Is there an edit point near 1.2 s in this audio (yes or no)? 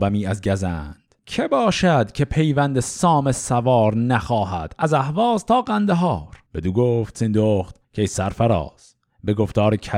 yes